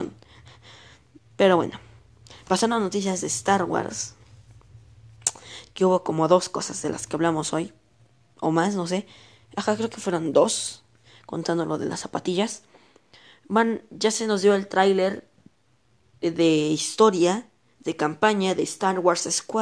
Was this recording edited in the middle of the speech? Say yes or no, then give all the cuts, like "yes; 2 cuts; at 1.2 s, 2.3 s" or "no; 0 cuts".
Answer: no; 0 cuts